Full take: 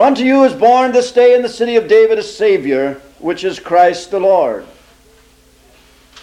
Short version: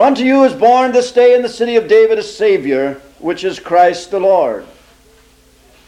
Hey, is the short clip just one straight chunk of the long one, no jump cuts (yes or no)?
yes